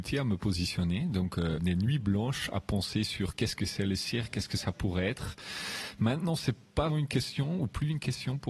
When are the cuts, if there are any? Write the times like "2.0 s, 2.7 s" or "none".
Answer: 1.6 s, 6.9 s